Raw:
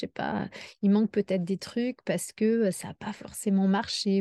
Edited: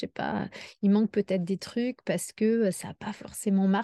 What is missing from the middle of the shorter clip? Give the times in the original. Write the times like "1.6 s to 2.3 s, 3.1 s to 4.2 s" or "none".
none